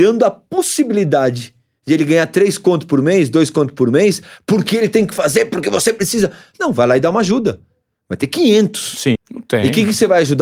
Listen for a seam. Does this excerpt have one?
yes; 2 cuts; at 7.9 s, 9.2 s

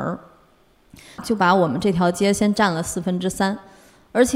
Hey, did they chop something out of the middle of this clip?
yes; 1 cut; at 1.2 s

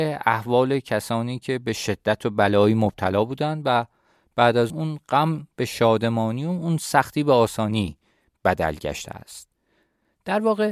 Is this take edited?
yes; 1 cut; at 4.7 s

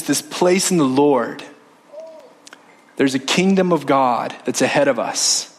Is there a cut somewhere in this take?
no; 0 cuts

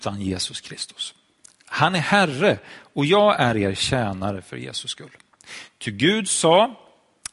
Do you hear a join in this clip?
no; 0 cuts

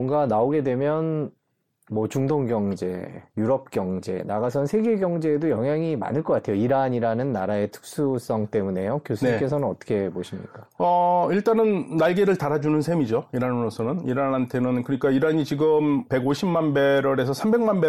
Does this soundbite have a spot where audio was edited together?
yes; 1 cut; at 16.1 s

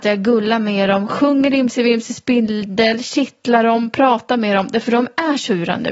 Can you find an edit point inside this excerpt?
no; 0 cuts

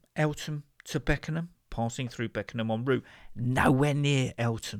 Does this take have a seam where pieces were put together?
yes; 1 cut; at 1.7 s

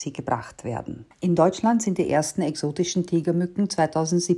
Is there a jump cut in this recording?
yes; 1 cut; at 1.1 s

